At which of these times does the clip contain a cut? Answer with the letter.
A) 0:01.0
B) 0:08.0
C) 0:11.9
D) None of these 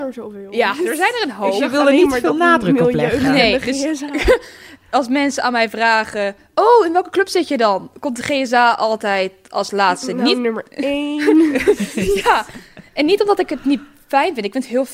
D